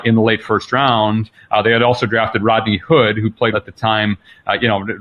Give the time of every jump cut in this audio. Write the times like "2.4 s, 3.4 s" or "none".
3.5 s